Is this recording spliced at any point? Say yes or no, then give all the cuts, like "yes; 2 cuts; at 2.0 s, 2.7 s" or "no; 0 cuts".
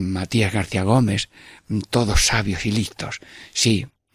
no; 0 cuts